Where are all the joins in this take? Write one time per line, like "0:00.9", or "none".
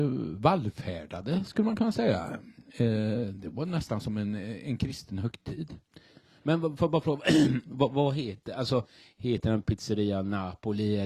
none